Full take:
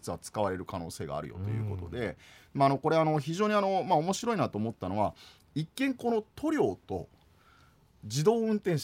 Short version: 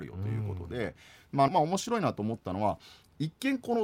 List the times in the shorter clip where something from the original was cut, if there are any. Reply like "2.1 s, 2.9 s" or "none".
1.5 s